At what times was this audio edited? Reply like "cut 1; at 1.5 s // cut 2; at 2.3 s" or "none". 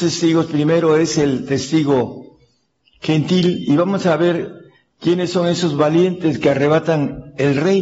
none